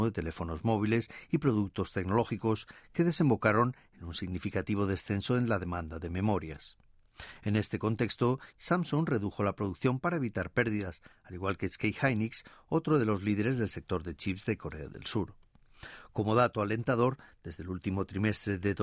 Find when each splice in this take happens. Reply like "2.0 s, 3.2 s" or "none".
8.5 s